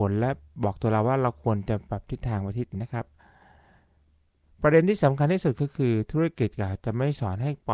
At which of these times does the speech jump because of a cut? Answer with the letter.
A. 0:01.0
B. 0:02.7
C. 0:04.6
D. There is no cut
B